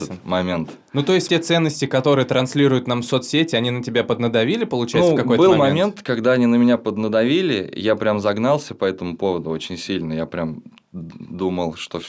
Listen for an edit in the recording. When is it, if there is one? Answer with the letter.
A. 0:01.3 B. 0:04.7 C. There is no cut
A